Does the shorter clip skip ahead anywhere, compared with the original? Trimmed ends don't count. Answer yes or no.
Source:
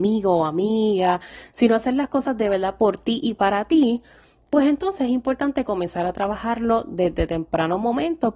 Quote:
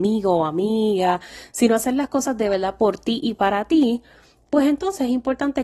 no